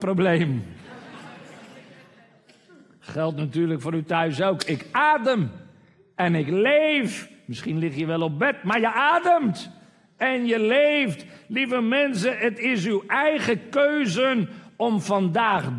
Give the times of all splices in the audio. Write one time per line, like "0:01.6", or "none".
none